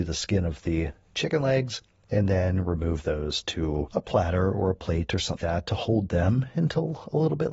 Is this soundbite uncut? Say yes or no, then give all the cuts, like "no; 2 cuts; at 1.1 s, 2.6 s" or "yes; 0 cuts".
no; 1 cut; at 5.4 s